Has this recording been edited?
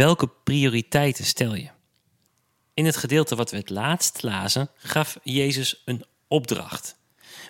no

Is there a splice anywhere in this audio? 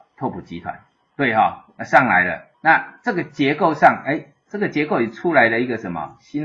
yes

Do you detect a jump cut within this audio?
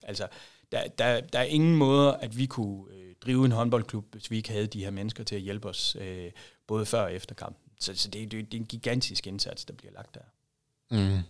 no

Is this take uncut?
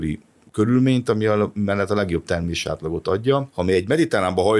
yes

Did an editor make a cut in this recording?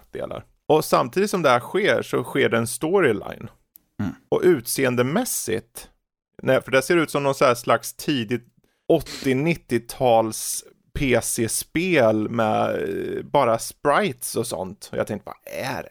yes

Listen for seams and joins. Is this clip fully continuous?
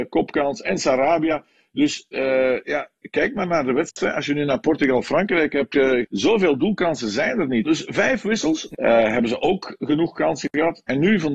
no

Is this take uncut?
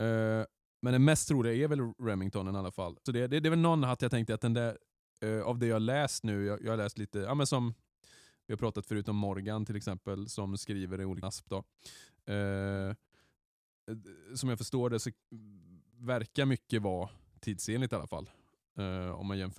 no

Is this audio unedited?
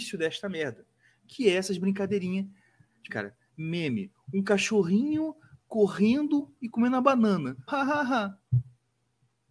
no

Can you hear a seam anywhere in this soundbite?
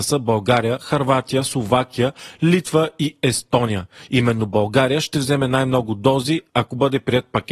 no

